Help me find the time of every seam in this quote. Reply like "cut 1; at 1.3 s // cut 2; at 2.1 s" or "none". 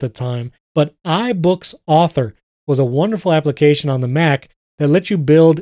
none